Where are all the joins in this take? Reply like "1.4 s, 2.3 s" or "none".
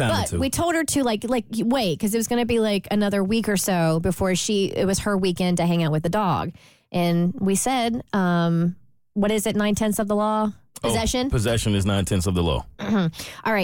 none